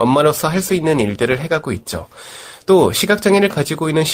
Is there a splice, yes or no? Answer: no